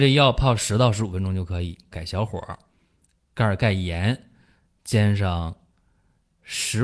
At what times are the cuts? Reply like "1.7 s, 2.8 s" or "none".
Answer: 1.9 s